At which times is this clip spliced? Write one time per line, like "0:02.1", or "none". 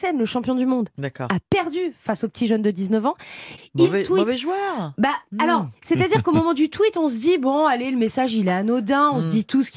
0:03.6